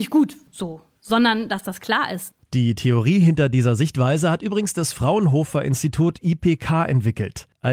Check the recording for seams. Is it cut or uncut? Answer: cut